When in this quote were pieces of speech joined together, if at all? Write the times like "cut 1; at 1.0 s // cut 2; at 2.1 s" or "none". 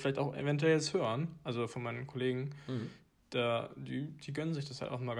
none